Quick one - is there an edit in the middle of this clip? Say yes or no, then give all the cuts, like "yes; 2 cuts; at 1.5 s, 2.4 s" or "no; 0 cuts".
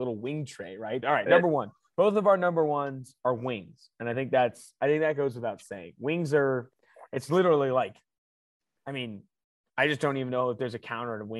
yes; 1 cut; at 1.0 s